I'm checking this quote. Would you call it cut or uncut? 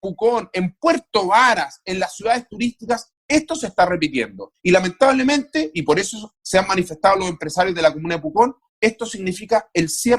uncut